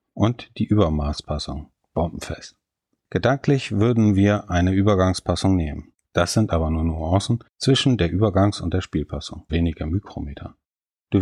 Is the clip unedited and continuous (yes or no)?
no